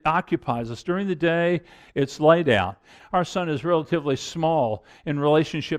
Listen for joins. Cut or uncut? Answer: cut